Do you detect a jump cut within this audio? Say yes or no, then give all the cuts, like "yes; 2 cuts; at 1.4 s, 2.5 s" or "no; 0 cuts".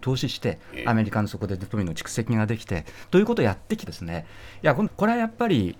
yes; 2 cuts; at 3.9 s, 4.9 s